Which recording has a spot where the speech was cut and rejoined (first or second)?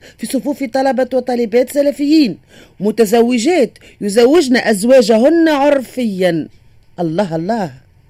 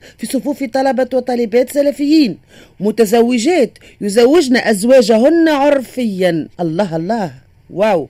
second